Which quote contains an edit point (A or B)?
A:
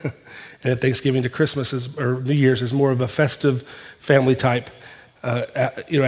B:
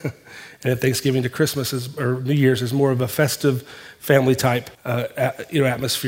B